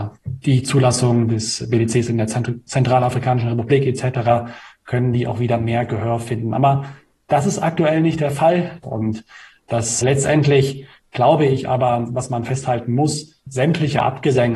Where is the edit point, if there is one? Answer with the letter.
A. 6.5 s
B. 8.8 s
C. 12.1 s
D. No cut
B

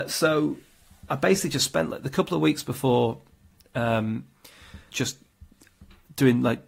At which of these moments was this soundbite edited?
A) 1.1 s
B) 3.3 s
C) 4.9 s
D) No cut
C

